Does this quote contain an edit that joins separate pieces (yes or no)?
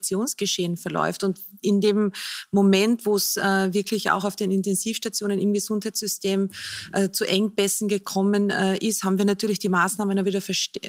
no